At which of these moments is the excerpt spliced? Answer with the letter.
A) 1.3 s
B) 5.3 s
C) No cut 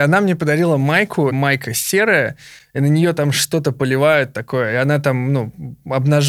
A